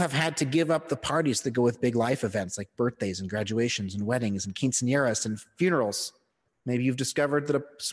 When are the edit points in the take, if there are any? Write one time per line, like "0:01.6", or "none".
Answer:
0:06.5